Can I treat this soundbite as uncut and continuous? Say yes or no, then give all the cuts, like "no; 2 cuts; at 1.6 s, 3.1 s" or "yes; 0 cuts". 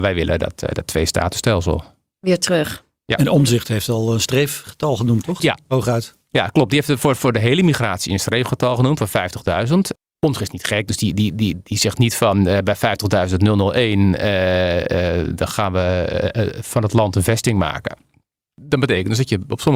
no; 1 cut; at 5.4 s